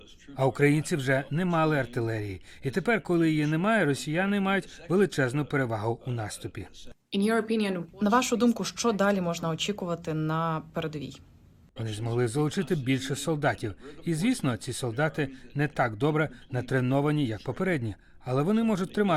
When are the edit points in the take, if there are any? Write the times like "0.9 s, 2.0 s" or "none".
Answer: 11.8 s